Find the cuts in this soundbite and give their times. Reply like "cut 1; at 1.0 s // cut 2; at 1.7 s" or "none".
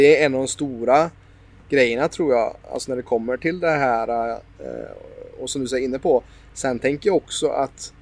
none